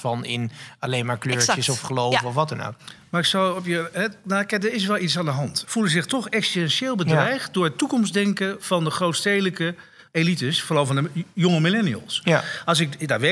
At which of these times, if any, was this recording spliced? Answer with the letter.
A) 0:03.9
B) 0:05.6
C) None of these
B